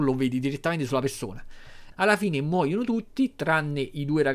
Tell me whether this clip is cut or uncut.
cut